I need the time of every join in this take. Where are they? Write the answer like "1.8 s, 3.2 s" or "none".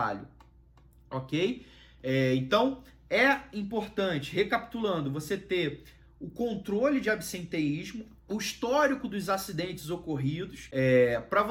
8.2 s

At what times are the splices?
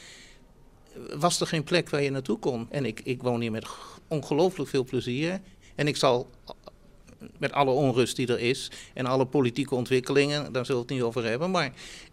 2.7 s, 7.4 s

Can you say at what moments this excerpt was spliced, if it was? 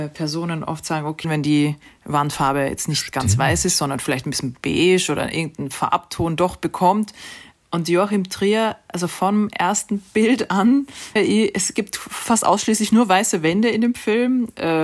1.2 s, 11.2 s

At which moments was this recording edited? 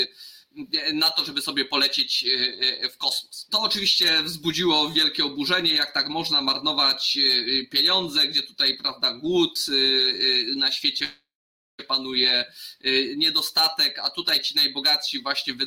3.5 s

